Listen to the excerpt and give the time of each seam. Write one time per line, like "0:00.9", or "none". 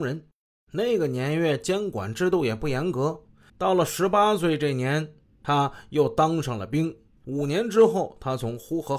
0:03.5